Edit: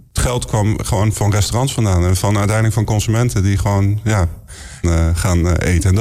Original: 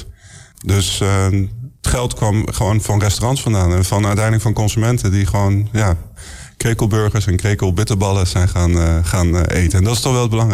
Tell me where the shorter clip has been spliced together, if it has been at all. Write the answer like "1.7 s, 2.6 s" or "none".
4.8 s